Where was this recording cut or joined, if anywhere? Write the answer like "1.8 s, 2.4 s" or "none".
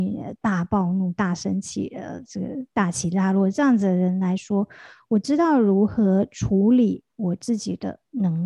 none

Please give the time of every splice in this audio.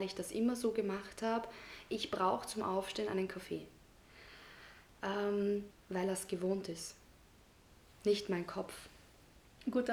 5.7 s

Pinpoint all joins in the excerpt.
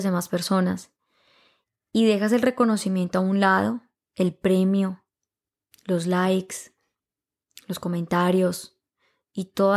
none

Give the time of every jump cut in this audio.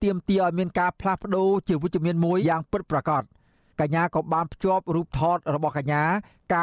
2.4 s

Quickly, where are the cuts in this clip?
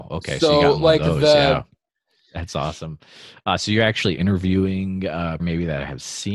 1.9 s, 5.4 s

